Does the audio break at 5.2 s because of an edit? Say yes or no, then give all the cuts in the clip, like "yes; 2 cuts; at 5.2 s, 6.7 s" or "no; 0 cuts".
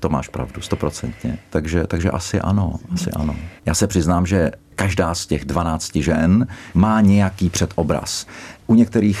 no; 3 cuts; at 1.5 s, 3.6 s, 6.7 s